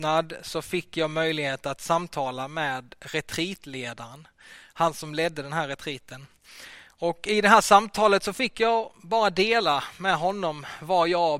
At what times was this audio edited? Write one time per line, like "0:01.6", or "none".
none